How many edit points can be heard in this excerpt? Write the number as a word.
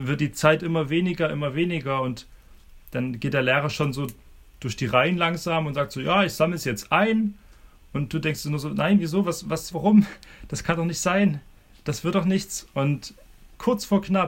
one